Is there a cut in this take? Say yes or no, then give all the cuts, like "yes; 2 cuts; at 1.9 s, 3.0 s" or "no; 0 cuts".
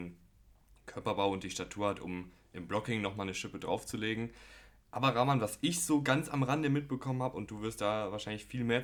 no; 0 cuts